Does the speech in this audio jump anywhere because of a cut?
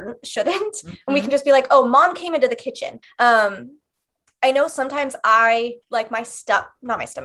yes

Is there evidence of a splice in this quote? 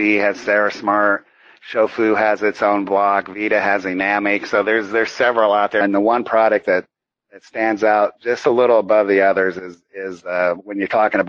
yes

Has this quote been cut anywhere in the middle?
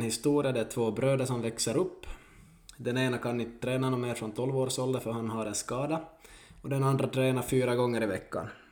no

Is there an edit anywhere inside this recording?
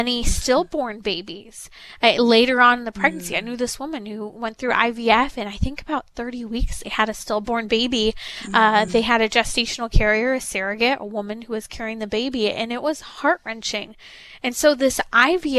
no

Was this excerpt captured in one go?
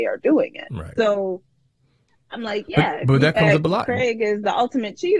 no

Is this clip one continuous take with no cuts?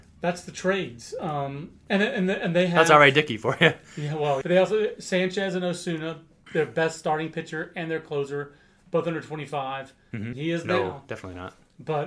no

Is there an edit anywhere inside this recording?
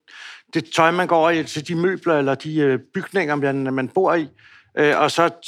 no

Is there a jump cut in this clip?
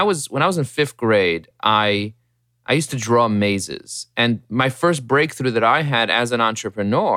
no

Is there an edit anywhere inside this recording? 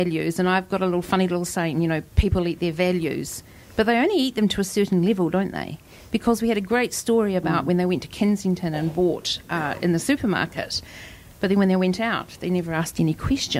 no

